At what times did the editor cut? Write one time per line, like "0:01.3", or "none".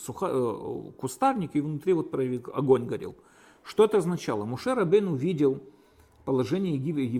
none